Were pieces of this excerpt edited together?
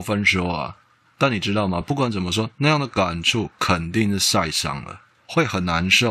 no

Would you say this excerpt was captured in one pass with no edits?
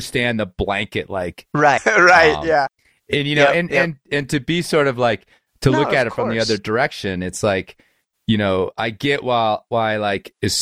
no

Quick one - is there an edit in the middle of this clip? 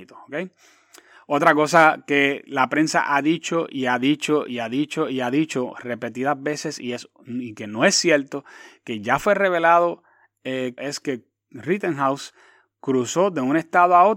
yes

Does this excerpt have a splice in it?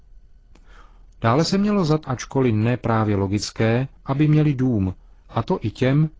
yes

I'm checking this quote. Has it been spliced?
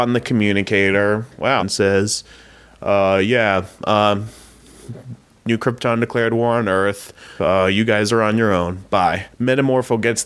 yes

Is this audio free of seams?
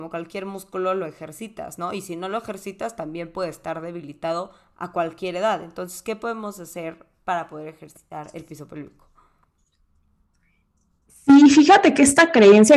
yes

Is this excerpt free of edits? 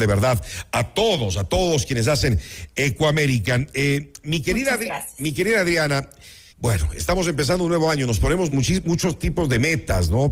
no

